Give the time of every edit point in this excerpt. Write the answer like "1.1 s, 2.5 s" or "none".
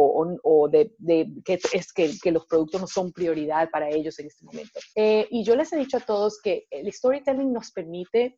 4.9 s